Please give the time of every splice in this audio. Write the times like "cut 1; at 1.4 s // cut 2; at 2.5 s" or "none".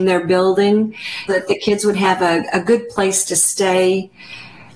cut 1; at 1.3 s